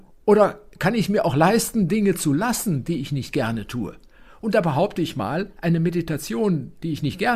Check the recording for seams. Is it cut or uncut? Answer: uncut